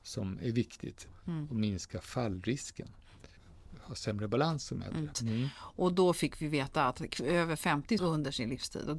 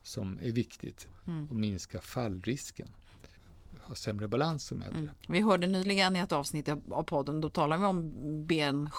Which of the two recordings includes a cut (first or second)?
first